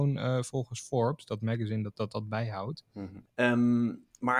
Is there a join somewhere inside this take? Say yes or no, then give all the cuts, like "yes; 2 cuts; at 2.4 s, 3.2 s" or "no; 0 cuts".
yes; 2 cuts; at 1.9 s, 3.3 s